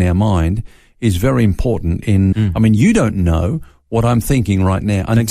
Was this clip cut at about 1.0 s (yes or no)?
no